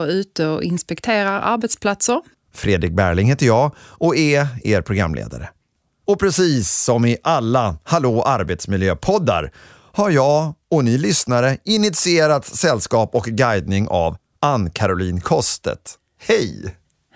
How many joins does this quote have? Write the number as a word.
one